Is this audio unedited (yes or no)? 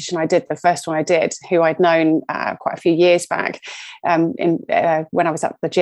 yes